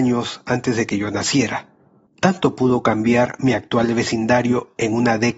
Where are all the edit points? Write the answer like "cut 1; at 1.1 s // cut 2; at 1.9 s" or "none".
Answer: cut 1; at 2.1 s